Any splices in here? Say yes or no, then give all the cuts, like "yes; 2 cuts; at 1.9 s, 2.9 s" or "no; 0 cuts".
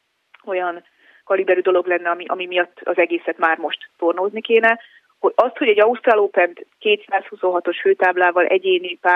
no; 0 cuts